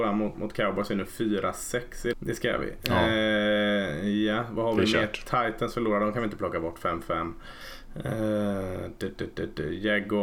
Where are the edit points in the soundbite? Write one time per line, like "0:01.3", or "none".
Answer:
0:02.1